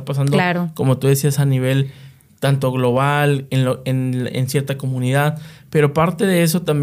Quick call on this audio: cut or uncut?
uncut